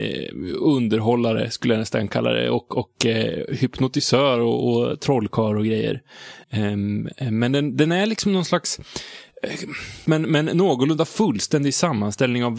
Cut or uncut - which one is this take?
cut